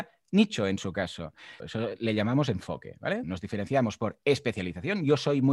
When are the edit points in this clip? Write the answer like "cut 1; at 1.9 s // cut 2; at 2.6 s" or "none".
cut 1; at 1.6 s // cut 2; at 3.2 s